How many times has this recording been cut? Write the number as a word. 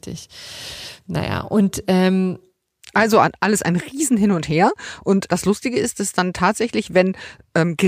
one